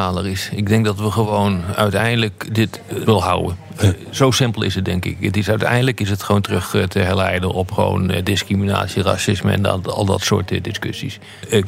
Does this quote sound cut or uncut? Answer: cut